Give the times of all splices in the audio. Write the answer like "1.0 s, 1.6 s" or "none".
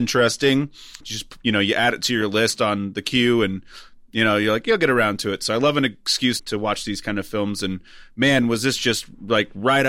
1.0 s, 6.4 s